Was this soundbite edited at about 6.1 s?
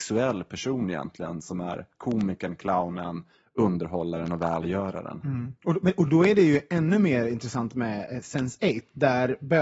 no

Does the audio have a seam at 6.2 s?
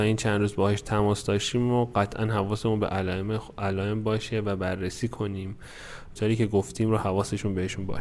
yes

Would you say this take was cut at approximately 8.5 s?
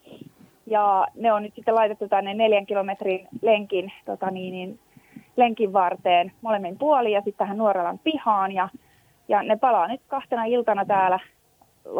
no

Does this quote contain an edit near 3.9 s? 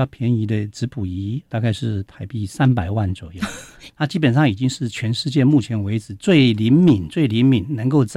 yes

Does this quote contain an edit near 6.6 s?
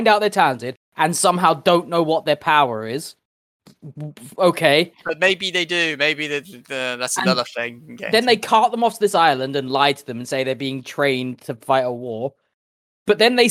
no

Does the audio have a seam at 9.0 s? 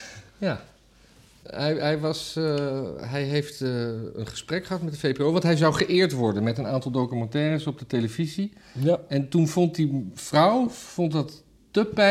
no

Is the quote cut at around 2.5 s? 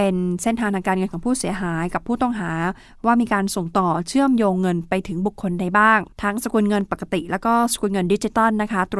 no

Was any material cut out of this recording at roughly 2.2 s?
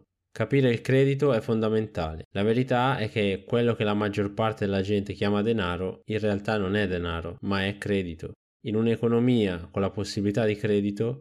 yes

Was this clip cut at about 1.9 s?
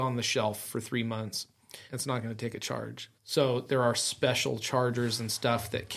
yes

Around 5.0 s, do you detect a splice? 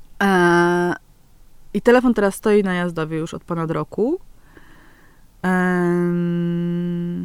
no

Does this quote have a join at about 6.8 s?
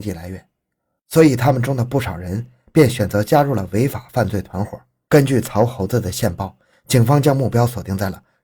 no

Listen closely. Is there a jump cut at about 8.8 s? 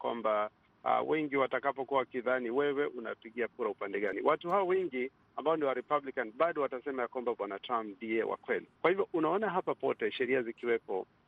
yes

